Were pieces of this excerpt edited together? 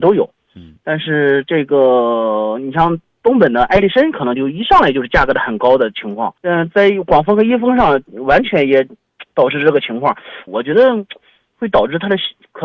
yes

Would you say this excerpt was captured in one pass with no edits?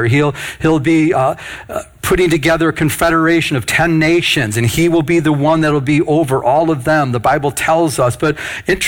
yes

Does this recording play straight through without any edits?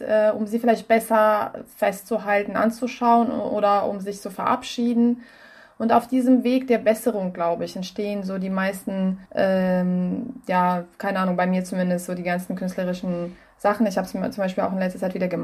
no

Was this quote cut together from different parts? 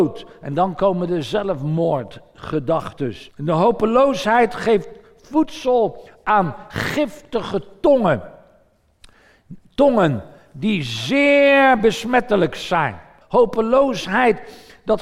yes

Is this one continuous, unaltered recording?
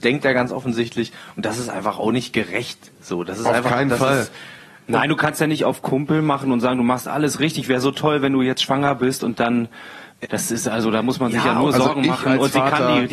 no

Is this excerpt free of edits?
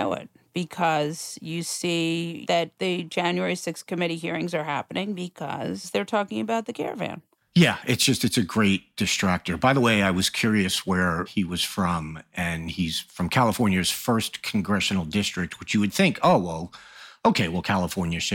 yes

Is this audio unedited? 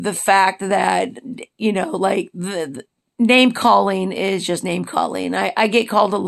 yes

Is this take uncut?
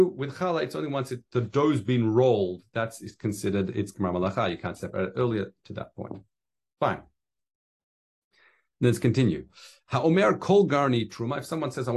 yes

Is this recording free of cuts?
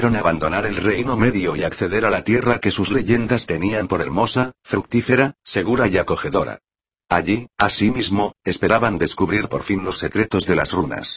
yes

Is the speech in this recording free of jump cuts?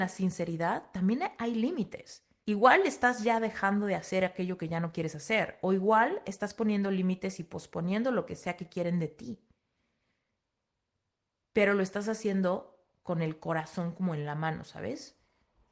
no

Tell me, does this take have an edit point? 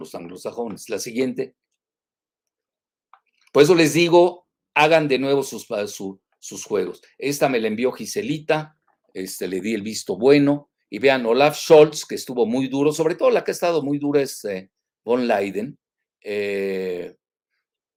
no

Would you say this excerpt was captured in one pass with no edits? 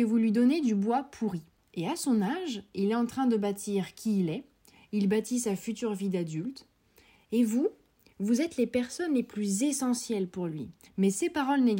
no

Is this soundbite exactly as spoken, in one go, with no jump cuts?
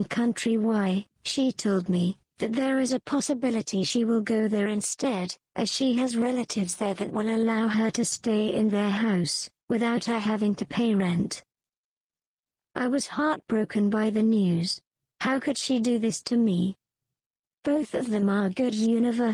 no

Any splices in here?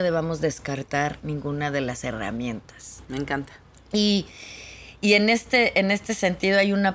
no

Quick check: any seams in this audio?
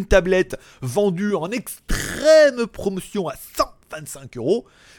no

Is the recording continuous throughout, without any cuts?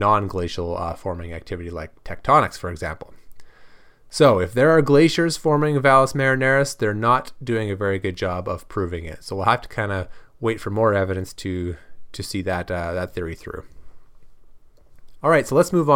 yes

